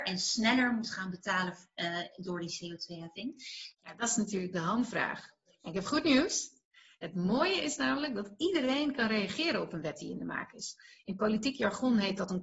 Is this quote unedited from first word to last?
no; 1 cut; at 3.7 s

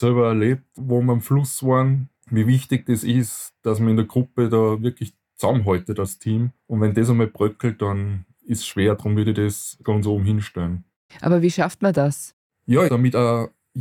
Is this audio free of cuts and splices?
no; 2 cuts; at 9.8 s, 12.9 s

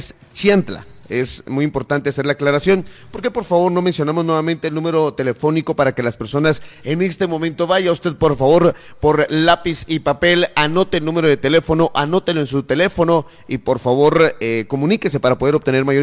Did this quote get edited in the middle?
no; 0 cuts

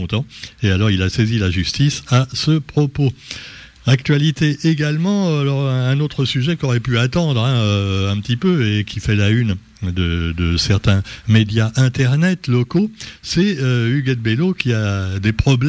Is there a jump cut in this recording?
yes; 1 cut; at 3.7 s

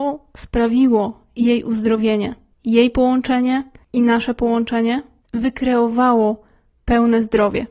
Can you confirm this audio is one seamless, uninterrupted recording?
yes; 0 cuts

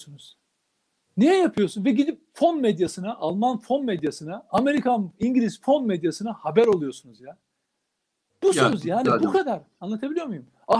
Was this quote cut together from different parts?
no; 0 cuts

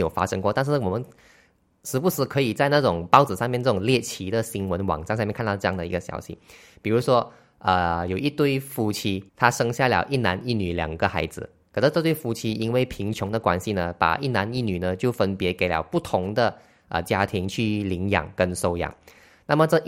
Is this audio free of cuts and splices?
no; 1 cut; at 9.3 s

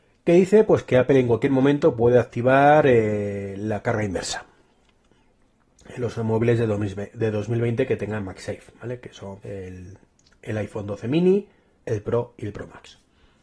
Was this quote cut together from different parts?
yes; 2 cuts; at 9.4 s, 11.8 s

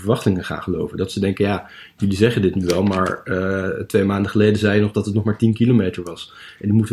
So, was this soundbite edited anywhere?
no; 0 cuts

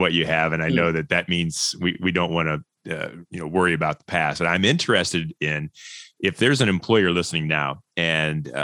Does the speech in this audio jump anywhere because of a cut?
no; 0 cuts

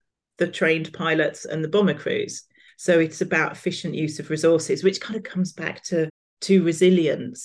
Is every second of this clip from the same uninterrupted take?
no; 1 cut; at 2.7 s

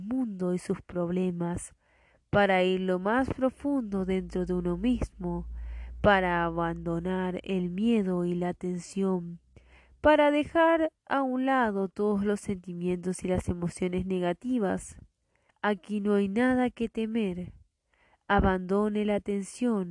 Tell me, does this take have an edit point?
yes; 1 cut; at 15.5 s

